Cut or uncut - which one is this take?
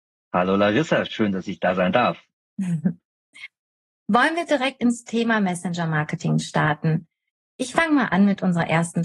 uncut